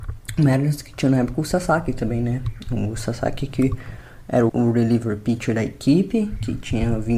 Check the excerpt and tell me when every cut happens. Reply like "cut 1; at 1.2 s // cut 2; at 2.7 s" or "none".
cut 1; at 4.5 s